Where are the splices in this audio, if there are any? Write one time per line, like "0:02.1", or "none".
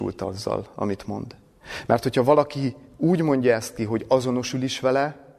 none